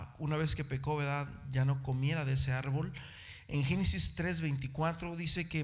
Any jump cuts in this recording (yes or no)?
no